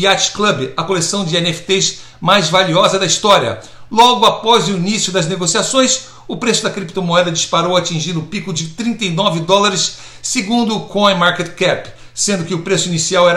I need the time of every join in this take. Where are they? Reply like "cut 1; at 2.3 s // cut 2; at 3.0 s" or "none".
none